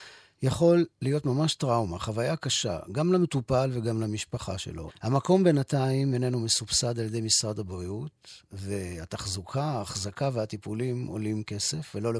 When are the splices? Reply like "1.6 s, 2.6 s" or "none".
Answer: 4.9 s